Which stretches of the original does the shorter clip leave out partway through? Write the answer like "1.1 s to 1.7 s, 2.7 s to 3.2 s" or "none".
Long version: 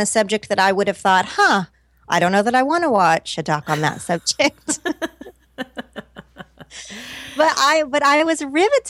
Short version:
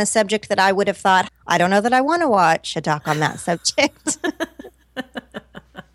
1.3 s to 1.9 s